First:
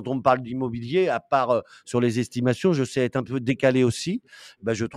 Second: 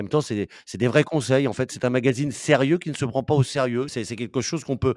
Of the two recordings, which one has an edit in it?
second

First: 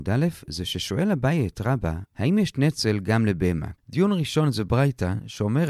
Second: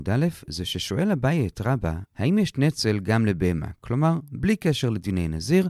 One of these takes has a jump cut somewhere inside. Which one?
first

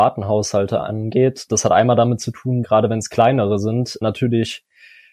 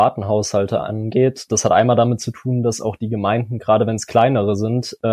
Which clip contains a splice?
first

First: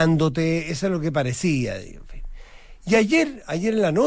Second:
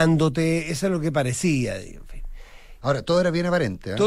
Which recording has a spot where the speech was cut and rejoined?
second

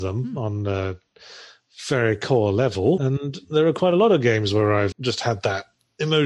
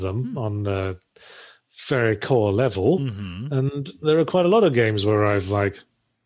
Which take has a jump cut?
first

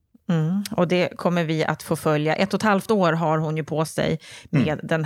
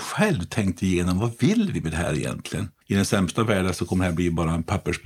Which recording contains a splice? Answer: second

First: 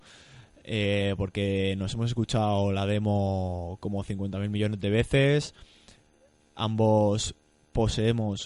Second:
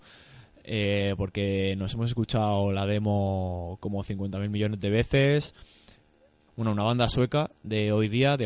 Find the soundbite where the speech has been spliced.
second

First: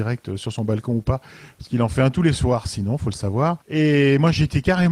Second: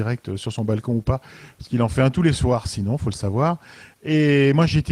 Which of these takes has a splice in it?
first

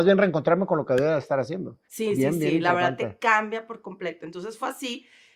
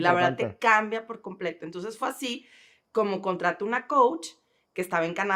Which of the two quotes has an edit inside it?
first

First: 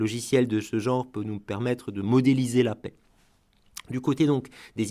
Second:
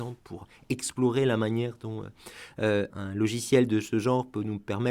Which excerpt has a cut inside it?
second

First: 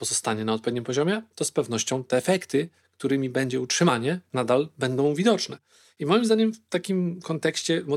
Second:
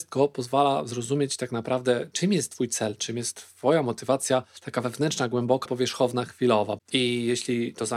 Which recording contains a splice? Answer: second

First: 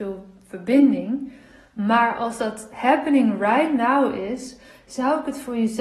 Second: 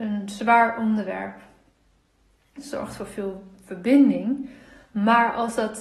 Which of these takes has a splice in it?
second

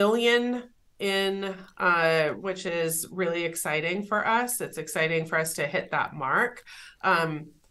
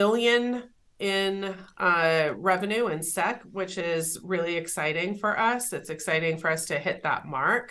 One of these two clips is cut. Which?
first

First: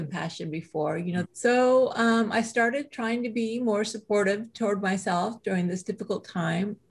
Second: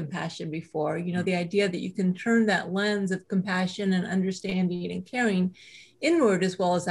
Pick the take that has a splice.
first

